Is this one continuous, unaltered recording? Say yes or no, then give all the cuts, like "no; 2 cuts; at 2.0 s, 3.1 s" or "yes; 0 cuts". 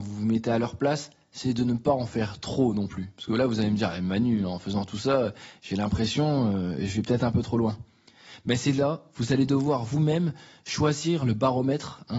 yes; 0 cuts